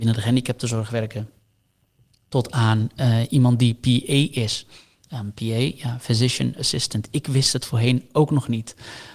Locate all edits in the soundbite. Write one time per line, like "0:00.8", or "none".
none